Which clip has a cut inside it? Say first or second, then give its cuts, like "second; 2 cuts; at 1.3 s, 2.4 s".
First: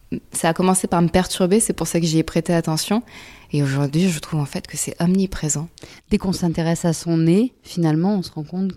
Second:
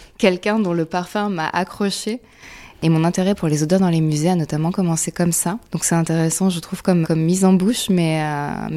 second; 2 cuts; at 5.7 s, 7.0 s